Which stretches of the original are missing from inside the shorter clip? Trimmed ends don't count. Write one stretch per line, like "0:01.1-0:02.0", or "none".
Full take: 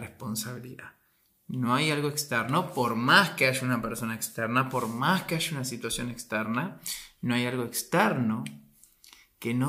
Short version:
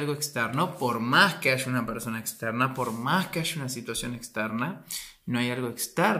none